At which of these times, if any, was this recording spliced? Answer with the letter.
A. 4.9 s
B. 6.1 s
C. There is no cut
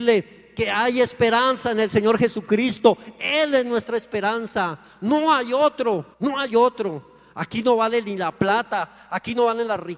B